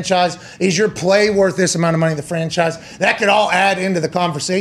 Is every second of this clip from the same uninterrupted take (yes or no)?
yes